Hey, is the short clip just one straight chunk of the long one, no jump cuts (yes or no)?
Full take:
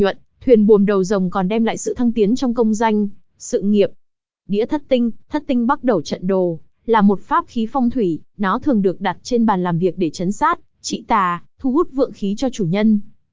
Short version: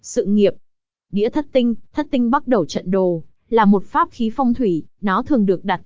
yes